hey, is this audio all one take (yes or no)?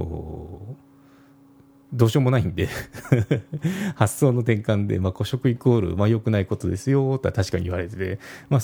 yes